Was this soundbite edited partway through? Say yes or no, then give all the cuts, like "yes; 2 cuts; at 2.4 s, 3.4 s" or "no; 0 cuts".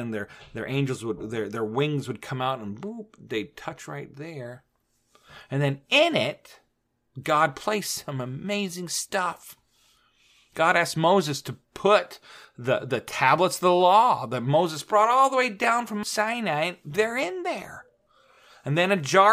no; 0 cuts